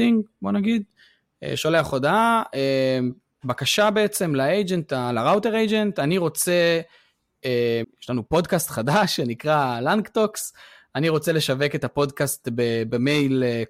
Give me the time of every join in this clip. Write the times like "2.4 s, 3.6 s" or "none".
7.8 s